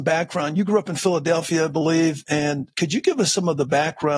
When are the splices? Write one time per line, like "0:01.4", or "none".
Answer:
0:02.7